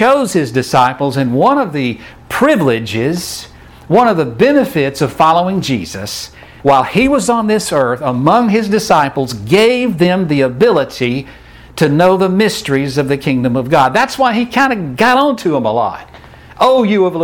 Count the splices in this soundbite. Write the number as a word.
one